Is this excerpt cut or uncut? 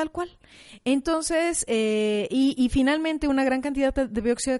uncut